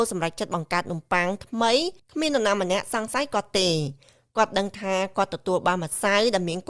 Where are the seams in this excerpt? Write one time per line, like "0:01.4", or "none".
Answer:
0:02.0